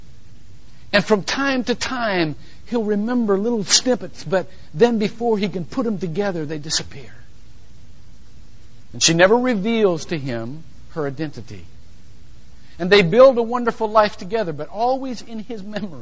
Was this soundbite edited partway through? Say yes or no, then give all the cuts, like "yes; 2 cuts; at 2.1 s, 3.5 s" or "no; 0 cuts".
yes; 1 cut; at 8.9 s